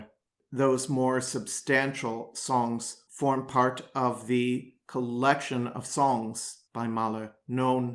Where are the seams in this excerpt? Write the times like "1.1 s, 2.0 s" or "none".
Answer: none